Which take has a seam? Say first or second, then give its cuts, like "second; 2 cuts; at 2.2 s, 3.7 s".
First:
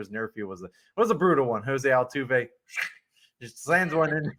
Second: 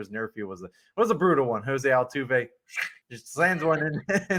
second; 1 cut; at 3.0 s